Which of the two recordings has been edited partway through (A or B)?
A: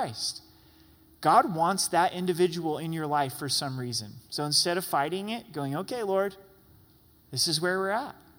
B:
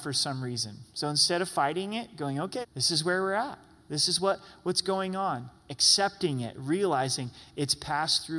B